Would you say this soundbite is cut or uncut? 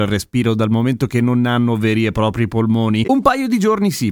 cut